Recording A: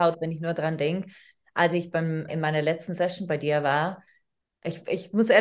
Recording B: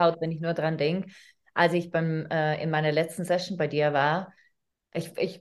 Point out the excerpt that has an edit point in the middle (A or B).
A